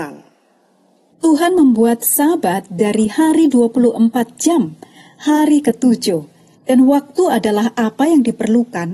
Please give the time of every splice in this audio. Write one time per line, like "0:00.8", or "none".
0:01.1
0:06.6